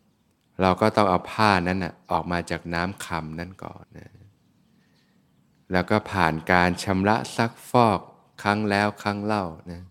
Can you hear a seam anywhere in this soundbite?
yes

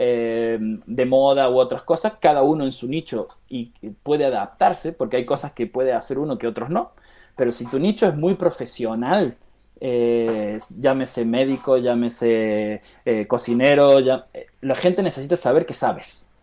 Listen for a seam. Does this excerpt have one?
no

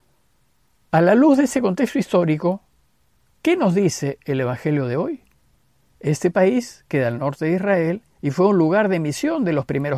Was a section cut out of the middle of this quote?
yes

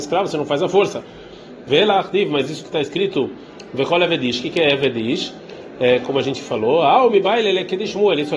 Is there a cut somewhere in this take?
no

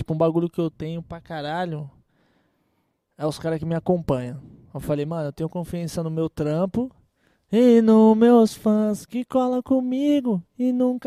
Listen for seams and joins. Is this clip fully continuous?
yes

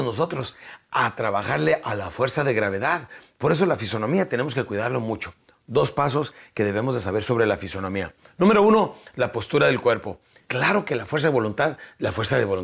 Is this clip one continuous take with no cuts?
no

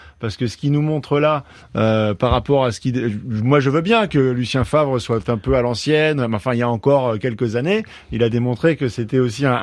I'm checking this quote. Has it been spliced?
no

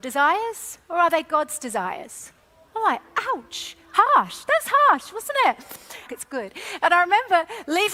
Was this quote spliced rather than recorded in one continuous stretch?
yes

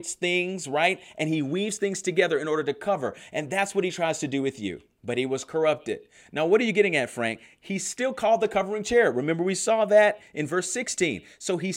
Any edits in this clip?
yes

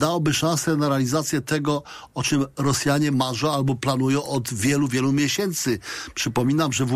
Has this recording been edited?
no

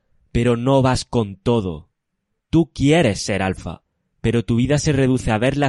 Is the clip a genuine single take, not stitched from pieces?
no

